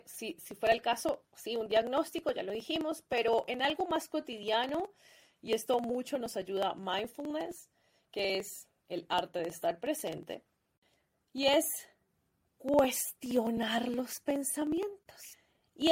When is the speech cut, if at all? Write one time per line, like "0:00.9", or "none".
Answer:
none